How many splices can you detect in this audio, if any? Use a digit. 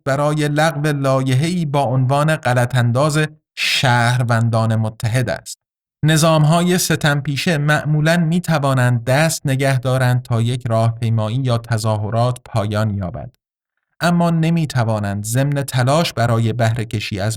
1